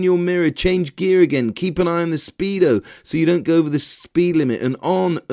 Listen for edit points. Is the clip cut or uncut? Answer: uncut